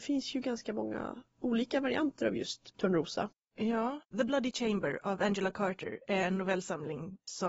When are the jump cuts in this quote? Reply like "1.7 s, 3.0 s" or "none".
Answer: 2.7 s